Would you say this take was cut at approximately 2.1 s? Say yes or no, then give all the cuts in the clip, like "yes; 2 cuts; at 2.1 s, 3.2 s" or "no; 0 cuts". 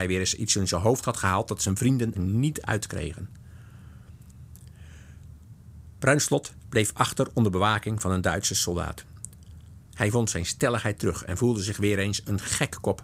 yes; 2 cuts; at 2.1 s, 9.8 s